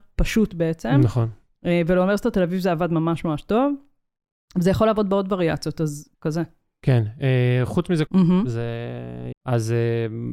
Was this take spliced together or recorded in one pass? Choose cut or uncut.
cut